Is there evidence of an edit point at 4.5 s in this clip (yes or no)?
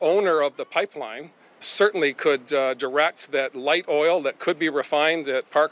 no